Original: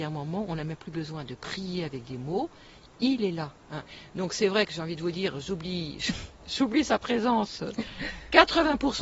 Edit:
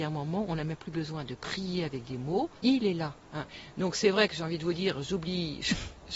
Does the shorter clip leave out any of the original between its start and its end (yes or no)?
yes